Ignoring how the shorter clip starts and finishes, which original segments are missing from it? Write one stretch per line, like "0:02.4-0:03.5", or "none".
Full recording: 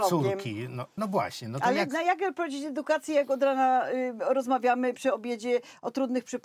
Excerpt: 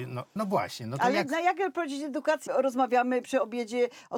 0:03.1-0:04.2